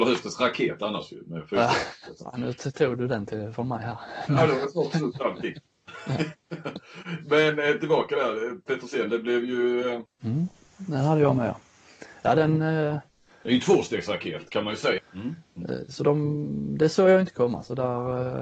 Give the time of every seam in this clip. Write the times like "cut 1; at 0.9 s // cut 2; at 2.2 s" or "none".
cut 1; at 10.1 s // cut 2; at 15.0 s